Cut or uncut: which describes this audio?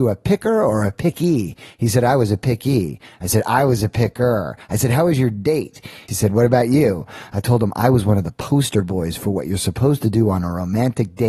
cut